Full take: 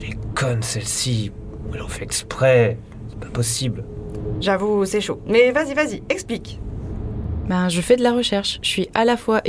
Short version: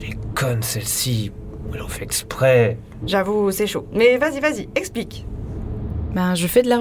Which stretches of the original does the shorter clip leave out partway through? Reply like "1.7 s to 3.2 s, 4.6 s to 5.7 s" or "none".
3.0 s to 4.3 s